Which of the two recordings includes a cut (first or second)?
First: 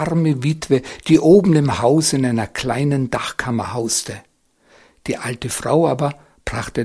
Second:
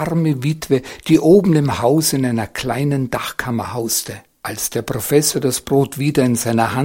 second